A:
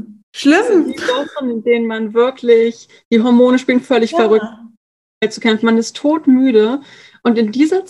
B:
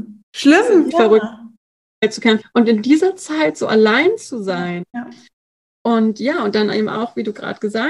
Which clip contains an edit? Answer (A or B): B